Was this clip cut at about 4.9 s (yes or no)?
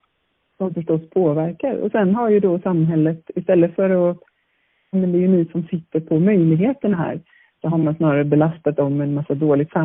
yes